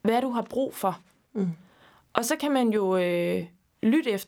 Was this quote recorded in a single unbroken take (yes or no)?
yes